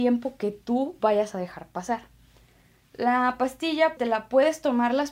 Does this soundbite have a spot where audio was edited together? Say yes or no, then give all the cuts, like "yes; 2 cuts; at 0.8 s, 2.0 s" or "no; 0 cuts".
yes; 1 cut; at 4.0 s